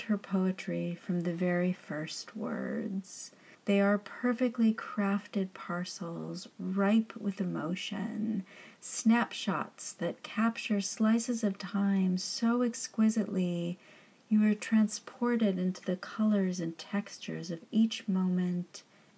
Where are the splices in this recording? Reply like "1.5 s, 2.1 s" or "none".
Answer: 3.5 s